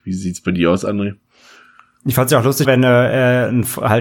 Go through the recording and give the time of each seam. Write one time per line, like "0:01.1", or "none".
0:02.6